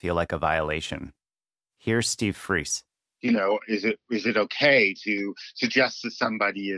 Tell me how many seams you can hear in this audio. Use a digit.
0